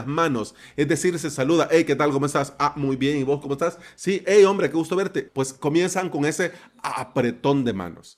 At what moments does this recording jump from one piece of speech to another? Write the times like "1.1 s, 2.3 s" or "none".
5.3 s